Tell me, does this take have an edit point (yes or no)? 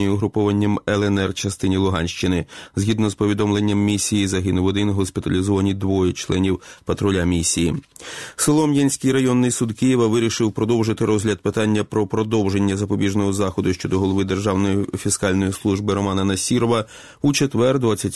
no